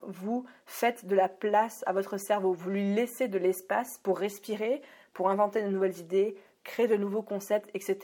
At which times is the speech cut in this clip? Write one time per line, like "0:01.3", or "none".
none